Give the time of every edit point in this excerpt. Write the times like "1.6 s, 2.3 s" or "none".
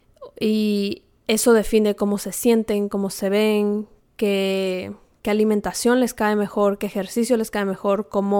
none